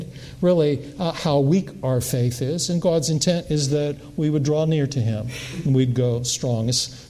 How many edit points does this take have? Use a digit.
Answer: 0